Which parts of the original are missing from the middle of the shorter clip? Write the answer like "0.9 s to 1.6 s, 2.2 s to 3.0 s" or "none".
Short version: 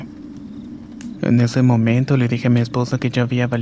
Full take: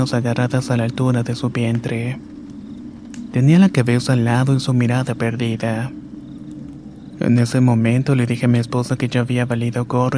3.3 s to 7.1 s